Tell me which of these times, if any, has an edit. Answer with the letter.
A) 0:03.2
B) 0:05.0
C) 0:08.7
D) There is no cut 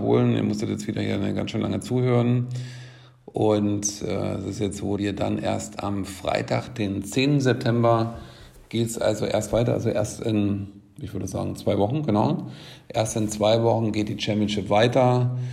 B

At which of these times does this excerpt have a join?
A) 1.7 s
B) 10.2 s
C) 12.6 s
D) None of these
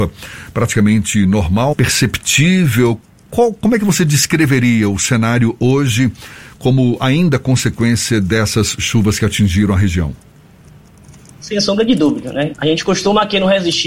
A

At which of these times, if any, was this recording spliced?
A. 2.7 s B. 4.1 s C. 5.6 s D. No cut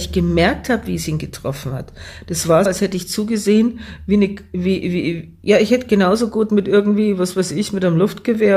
A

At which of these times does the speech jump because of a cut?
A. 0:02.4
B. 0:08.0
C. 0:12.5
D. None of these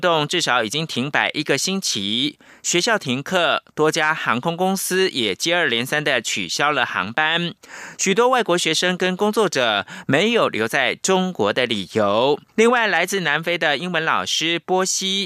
C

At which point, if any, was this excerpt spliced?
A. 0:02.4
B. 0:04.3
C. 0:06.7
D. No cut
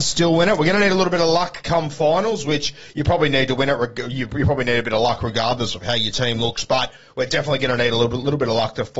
D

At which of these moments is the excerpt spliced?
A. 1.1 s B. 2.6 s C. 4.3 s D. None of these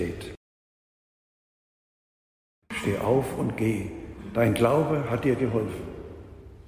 B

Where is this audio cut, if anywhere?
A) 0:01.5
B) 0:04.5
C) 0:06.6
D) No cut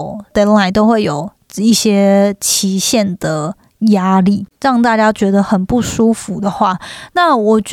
B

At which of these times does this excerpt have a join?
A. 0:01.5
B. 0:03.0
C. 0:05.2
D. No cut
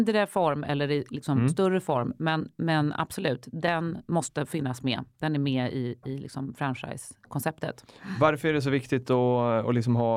D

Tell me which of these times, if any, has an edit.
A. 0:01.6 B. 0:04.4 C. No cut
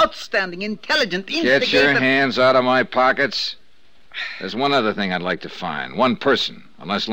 C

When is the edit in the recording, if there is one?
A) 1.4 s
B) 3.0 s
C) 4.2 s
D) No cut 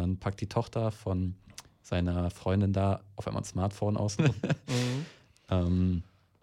C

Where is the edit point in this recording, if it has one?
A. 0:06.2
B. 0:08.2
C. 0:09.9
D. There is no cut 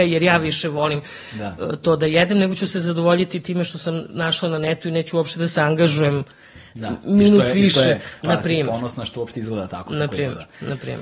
B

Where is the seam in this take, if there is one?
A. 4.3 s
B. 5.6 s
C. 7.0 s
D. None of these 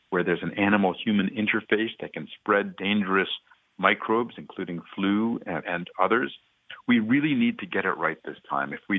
B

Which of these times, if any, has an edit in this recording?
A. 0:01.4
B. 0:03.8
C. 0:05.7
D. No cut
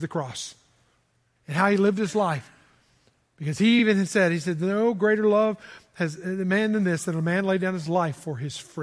D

